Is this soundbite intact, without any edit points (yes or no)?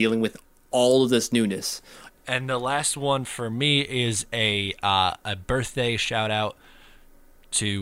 no